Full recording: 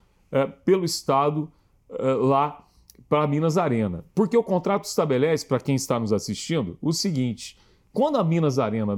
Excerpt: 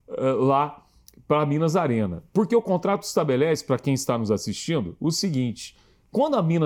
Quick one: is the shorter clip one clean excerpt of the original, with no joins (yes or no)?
yes